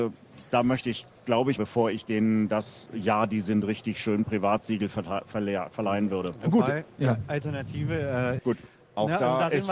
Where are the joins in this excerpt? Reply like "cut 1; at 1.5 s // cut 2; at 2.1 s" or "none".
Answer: cut 1; at 1.6 s // cut 2; at 8.4 s